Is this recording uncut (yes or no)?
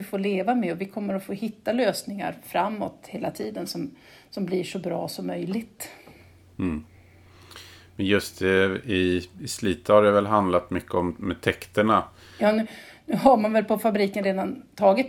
yes